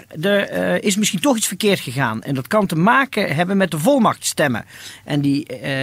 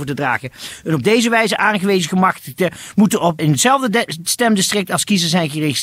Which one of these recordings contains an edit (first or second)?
second